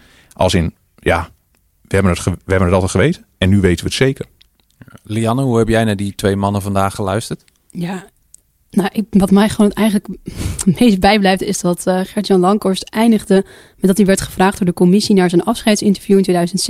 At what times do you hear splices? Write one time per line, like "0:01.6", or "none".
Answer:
none

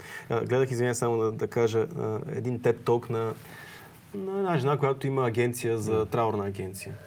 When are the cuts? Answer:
none

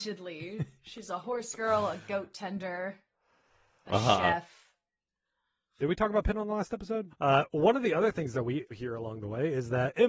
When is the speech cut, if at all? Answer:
0:05.8
0:07.1
0:08.7

